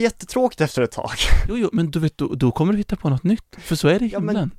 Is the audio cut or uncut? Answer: uncut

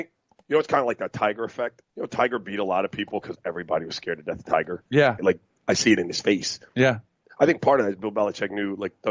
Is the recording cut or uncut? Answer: cut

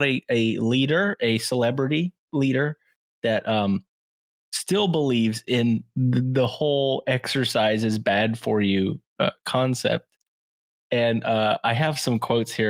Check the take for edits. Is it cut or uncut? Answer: uncut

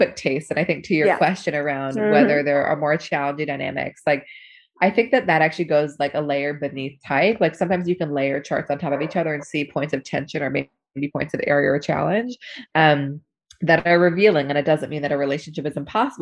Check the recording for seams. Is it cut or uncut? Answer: uncut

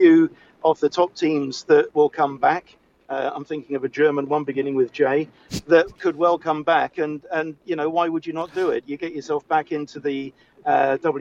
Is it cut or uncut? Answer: cut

